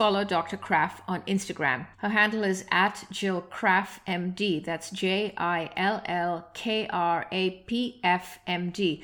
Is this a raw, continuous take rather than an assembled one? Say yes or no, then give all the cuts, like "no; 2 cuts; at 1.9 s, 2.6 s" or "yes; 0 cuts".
no; 1 cut; at 1.9 s